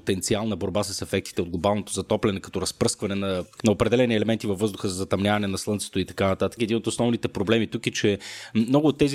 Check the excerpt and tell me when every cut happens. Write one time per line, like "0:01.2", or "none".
0:03.6
0:06.6